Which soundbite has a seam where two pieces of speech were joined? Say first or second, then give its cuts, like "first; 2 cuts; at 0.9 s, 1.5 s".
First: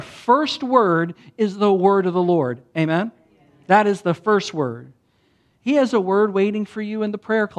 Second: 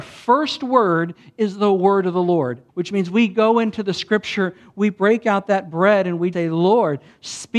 second; 2 cuts; at 2.7 s, 6.3 s